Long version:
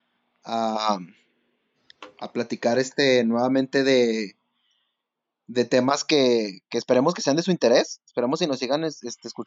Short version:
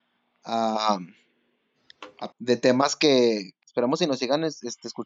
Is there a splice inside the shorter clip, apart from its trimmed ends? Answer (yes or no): yes